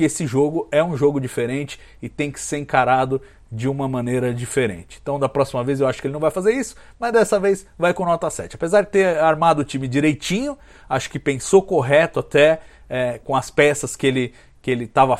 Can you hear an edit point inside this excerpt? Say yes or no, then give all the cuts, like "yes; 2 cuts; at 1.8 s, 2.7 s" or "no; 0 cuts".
yes; 1 cut; at 13.2 s